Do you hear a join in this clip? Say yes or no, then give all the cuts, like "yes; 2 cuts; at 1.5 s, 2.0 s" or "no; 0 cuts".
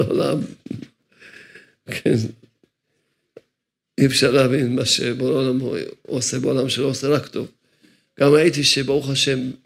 no; 0 cuts